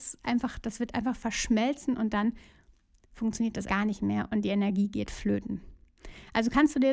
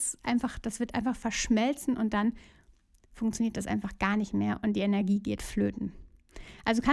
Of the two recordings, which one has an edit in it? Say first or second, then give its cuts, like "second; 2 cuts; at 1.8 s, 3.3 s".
first; 1 cut; at 3.7 s